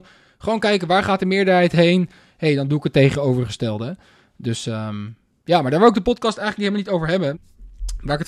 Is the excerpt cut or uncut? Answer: cut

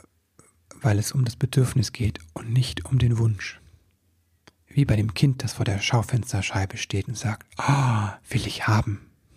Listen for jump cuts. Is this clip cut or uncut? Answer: uncut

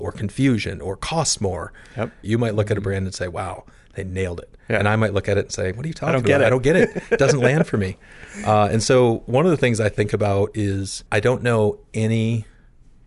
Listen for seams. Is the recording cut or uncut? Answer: cut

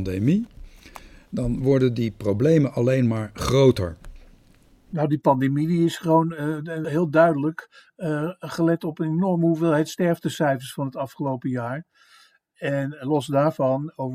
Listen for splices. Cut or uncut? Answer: cut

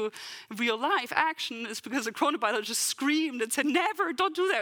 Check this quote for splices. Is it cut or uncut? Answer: uncut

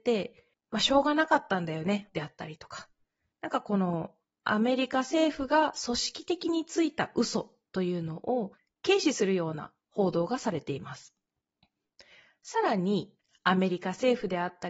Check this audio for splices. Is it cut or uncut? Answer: cut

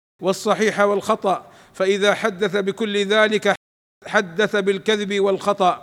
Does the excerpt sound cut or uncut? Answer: uncut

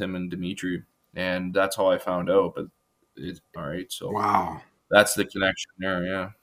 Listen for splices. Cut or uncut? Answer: cut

